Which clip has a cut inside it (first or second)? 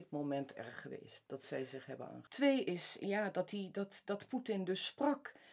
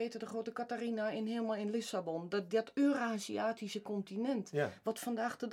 first